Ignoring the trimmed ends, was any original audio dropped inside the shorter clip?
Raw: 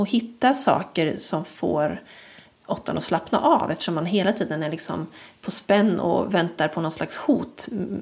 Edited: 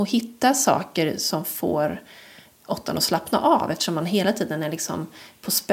no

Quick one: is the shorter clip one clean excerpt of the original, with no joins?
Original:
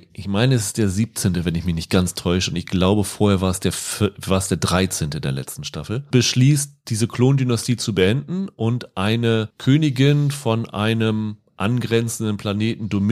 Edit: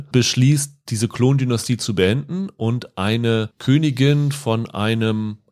yes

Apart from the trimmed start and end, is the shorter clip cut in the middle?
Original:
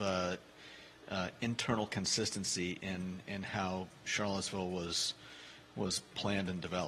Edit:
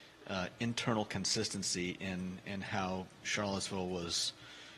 no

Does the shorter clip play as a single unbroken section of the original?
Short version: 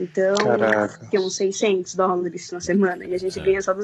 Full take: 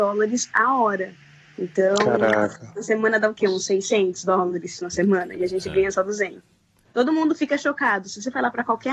no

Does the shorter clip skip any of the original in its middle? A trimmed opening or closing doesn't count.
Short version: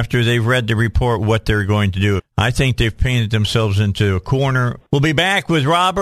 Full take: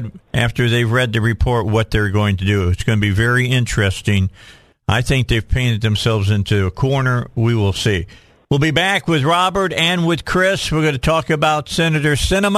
yes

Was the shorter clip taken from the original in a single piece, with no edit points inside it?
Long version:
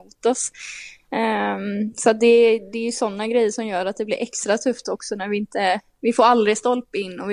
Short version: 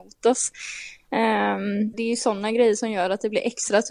no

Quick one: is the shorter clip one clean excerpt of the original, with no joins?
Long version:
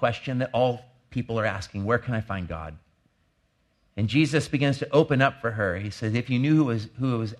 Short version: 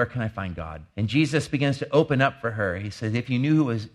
no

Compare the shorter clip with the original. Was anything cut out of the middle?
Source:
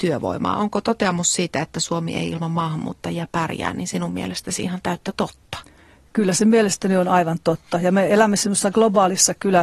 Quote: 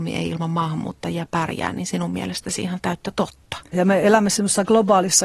yes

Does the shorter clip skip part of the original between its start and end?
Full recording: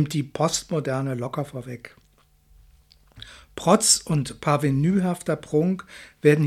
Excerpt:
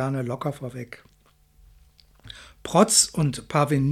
no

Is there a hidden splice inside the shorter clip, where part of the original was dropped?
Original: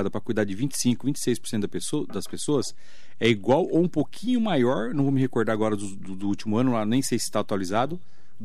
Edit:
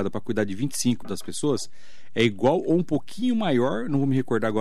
yes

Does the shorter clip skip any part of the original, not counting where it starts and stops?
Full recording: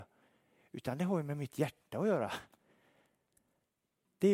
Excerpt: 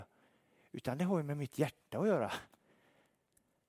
no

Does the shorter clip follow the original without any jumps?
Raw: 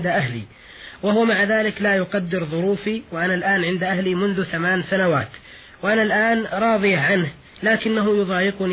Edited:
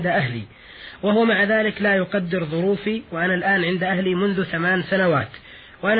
yes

